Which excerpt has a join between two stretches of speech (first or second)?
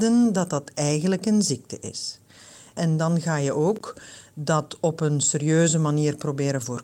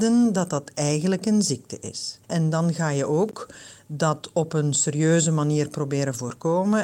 second